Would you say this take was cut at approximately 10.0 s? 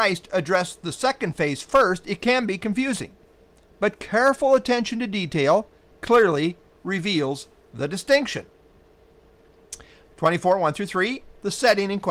yes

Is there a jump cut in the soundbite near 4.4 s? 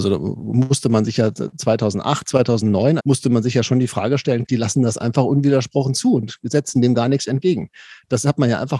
yes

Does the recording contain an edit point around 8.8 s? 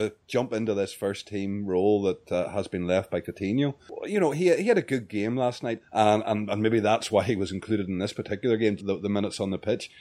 yes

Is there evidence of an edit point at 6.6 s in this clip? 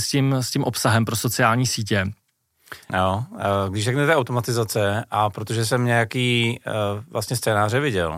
no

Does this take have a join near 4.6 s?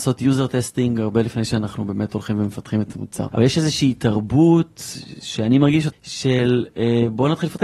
no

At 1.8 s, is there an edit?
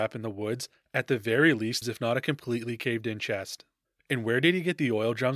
yes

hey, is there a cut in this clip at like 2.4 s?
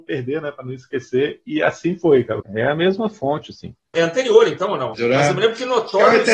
yes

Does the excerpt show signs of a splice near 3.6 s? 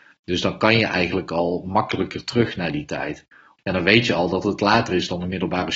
yes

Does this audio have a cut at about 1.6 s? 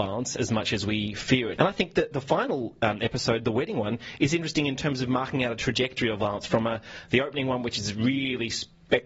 yes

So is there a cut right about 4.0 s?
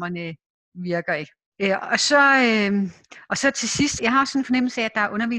yes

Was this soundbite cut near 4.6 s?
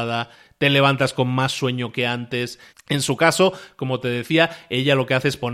no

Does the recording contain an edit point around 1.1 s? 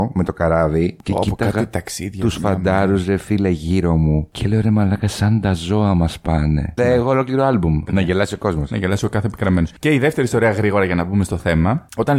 no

